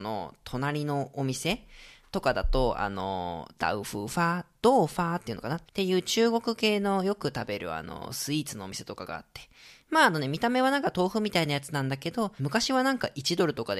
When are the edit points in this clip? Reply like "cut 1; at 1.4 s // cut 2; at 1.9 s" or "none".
cut 1; at 5.7 s // cut 2; at 12.4 s